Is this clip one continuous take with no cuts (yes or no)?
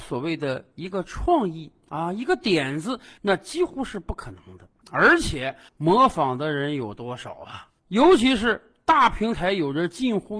no